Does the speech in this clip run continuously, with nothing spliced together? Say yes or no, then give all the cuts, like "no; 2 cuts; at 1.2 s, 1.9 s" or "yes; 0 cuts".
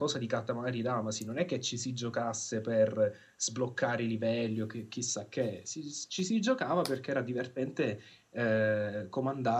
yes; 0 cuts